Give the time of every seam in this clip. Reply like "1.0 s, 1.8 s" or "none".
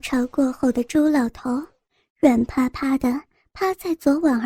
none